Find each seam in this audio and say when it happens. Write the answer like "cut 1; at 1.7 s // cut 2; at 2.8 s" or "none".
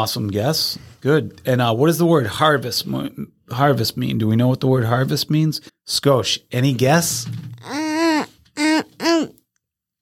cut 1; at 5.7 s